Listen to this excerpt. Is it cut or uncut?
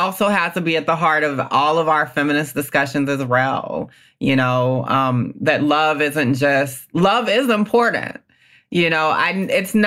uncut